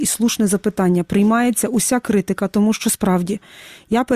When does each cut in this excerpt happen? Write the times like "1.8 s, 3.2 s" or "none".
none